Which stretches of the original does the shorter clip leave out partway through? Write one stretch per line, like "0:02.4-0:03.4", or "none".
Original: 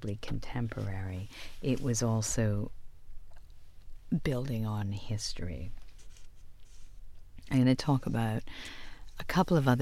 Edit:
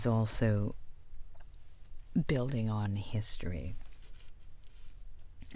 none